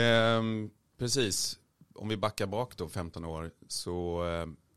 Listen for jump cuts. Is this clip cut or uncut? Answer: uncut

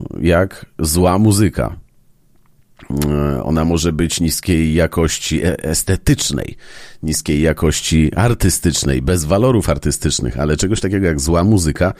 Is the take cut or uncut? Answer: uncut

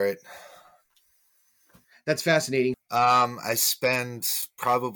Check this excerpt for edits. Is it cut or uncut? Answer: cut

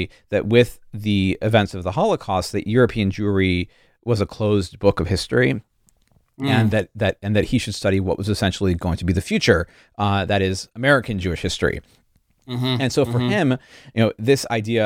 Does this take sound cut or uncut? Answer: uncut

